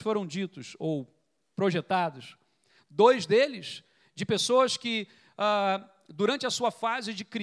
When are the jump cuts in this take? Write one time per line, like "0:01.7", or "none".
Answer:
none